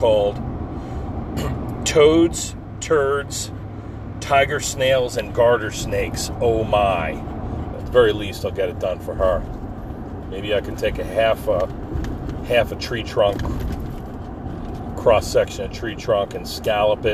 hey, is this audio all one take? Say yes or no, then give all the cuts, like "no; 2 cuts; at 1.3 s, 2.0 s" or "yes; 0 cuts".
no; 2 cuts; at 7.7 s, 10.2 s